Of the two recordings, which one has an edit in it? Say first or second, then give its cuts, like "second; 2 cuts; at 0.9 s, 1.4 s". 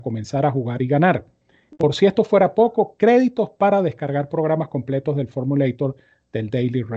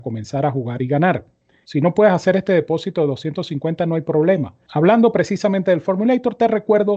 second; 2 cuts; at 1.6 s, 4.7 s